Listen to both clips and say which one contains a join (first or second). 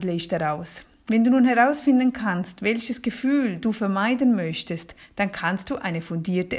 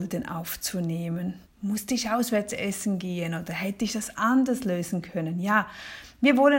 second